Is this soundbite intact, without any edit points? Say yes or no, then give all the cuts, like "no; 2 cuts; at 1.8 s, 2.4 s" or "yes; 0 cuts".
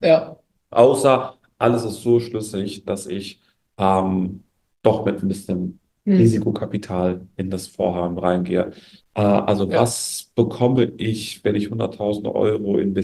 no; 1 cut; at 9.0 s